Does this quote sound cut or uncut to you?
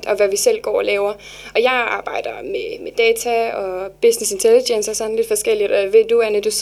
uncut